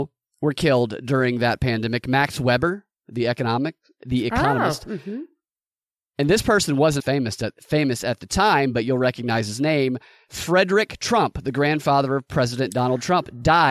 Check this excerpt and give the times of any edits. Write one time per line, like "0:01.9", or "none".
0:07.0